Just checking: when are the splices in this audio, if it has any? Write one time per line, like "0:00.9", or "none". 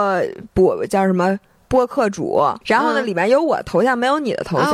0:02.6